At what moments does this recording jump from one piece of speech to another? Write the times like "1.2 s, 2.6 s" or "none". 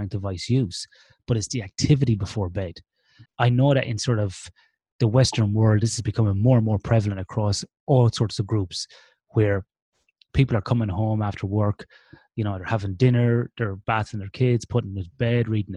3.3 s